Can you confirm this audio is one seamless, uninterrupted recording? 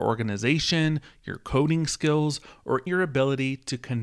no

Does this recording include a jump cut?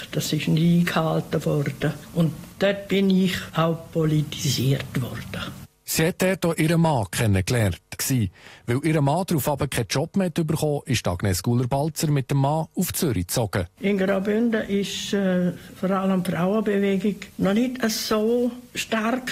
yes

